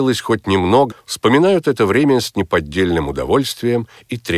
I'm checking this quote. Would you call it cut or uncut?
cut